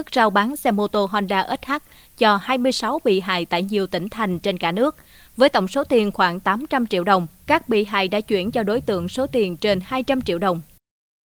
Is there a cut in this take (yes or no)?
no